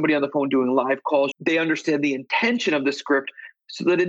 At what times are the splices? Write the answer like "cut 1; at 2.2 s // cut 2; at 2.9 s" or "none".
cut 1; at 1.3 s